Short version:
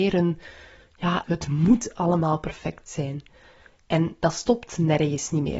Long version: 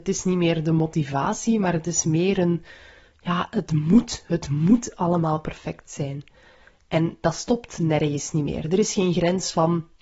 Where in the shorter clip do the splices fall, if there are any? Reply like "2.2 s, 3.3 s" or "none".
1.2 s